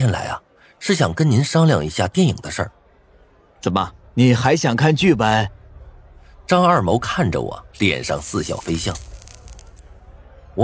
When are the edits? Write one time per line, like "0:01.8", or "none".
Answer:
0:04.0
0:07.7